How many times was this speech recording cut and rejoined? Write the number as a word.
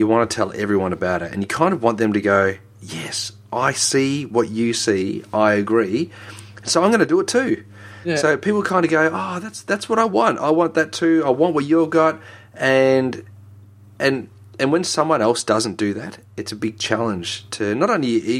zero